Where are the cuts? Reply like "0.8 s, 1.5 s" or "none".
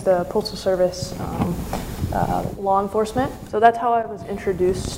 3.5 s